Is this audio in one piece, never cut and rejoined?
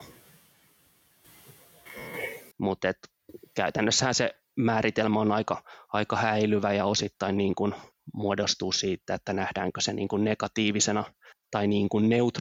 no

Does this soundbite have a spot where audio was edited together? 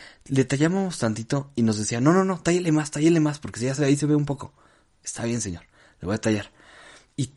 no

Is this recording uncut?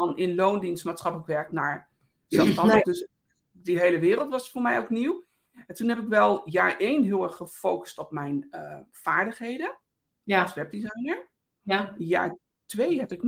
yes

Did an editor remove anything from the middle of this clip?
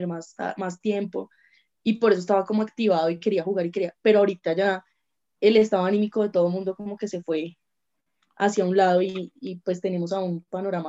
no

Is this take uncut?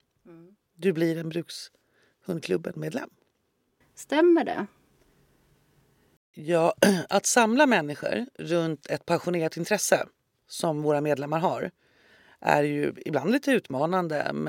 no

